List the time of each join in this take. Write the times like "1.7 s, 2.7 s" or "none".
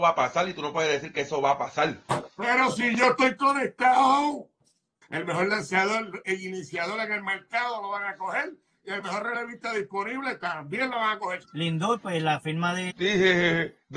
5.0 s, 11.4 s, 12.9 s

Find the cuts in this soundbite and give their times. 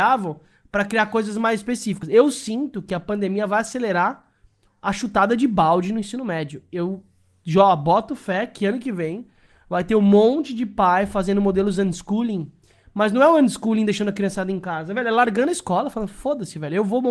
none

